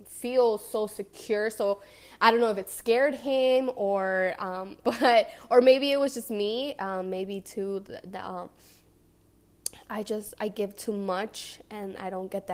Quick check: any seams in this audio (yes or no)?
yes